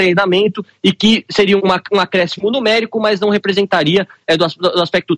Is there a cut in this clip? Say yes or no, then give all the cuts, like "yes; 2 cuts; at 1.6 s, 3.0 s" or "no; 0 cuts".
yes; 1 cut; at 1.6 s